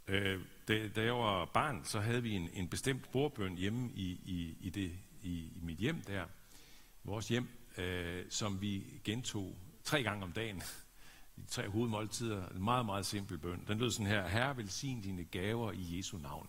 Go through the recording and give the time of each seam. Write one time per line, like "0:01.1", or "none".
none